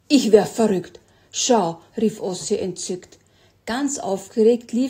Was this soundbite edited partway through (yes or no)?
yes